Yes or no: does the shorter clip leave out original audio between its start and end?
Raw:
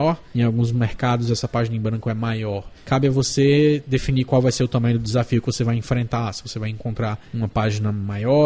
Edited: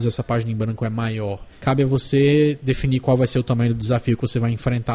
no